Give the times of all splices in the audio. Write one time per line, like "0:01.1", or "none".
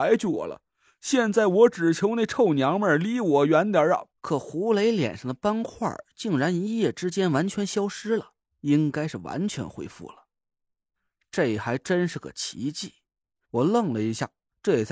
0:04.1
0:08.5
0:13.4

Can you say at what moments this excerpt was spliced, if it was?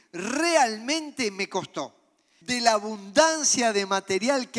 0:02.4

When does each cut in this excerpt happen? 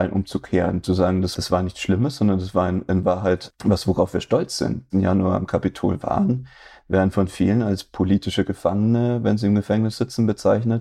0:04.9

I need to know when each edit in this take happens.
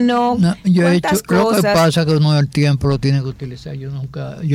none

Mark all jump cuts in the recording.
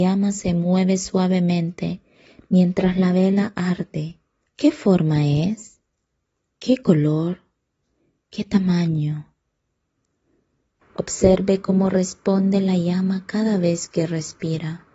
0:04.5
0:10.8

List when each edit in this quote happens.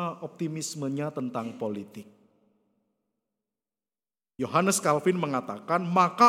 none

